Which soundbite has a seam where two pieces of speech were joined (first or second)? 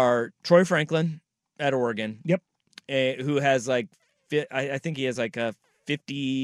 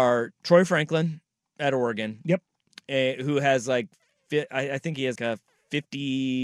second